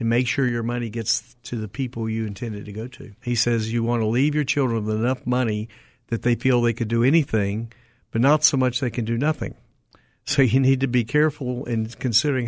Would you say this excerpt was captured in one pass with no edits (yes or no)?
no